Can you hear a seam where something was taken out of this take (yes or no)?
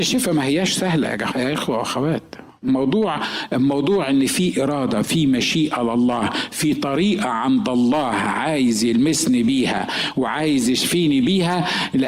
no